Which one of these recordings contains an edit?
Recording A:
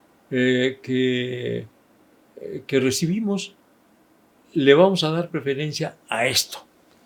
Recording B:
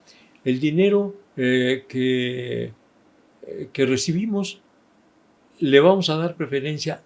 B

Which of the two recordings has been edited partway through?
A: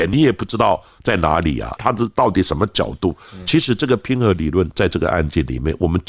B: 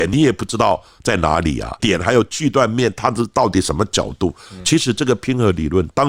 A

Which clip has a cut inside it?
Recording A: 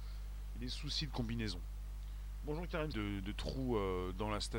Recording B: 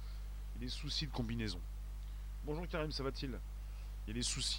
A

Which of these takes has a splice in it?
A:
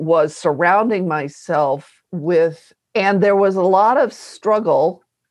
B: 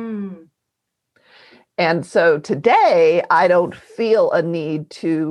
A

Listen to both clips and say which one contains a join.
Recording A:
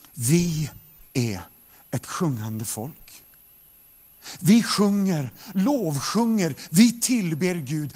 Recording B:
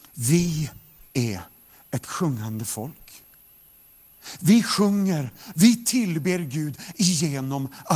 B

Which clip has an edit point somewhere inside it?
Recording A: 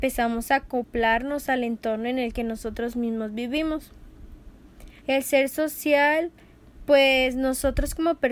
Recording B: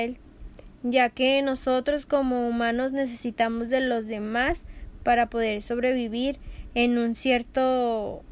A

